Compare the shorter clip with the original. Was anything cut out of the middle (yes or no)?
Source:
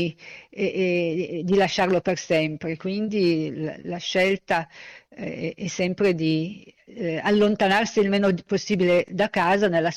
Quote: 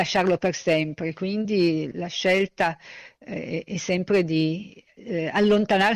yes